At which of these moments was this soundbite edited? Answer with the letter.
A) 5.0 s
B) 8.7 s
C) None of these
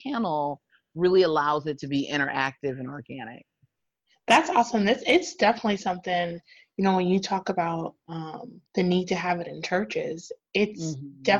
B